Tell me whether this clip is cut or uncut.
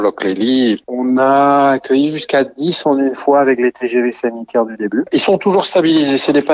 uncut